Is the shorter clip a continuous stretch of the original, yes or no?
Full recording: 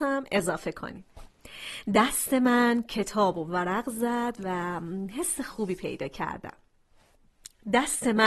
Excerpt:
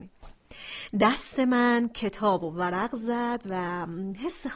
yes